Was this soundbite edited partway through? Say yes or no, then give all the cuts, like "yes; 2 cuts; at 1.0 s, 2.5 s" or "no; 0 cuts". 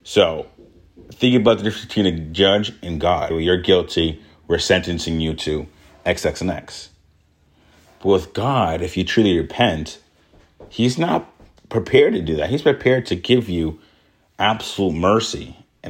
yes; 1 cut; at 3.3 s